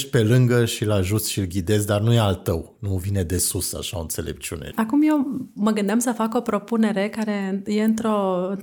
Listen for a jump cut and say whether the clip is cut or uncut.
cut